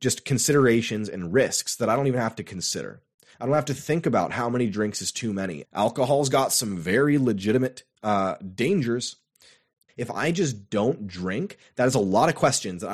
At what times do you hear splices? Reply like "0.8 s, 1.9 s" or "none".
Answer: 3.3 s, 5.6 s, 9.9 s